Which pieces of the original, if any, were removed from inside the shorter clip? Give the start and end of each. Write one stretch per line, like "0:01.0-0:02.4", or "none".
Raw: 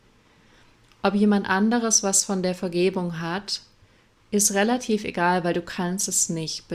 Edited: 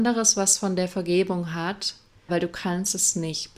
0:03.9-0:05.4